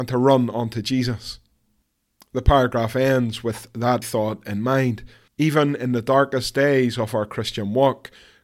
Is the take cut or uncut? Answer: cut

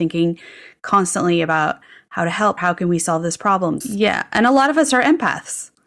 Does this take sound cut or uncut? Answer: cut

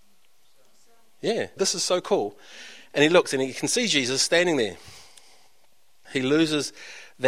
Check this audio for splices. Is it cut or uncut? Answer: cut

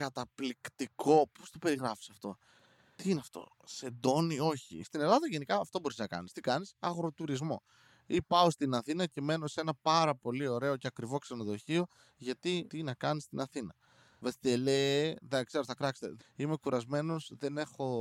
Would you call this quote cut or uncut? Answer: cut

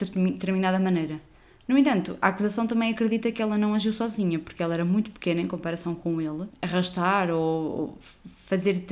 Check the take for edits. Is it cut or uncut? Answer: uncut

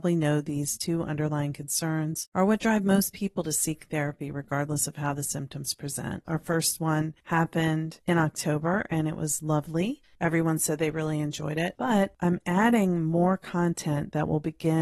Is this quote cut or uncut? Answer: cut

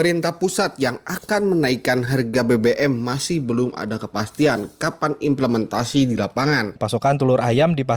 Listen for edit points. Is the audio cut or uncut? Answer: cut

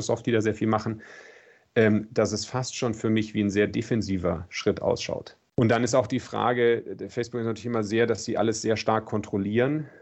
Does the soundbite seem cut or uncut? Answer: cut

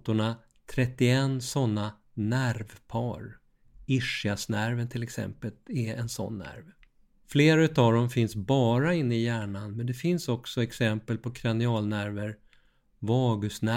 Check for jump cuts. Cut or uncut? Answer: cut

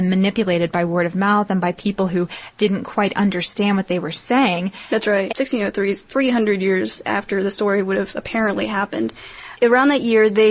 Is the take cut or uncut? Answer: cut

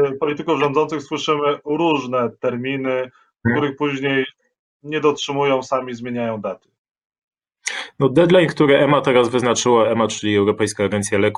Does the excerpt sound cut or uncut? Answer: uncut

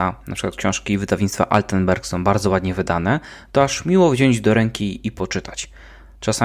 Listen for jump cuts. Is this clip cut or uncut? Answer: uncut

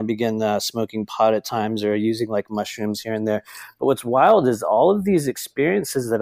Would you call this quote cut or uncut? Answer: uncut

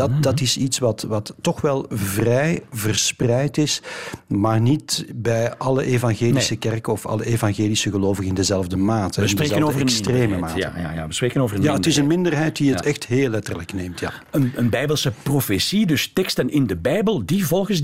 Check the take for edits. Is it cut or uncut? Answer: uncut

